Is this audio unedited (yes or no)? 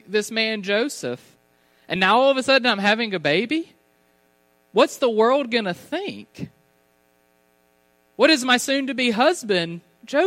yes